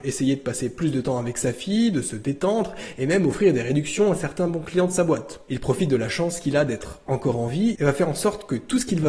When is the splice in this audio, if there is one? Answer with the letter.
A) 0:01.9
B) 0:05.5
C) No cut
B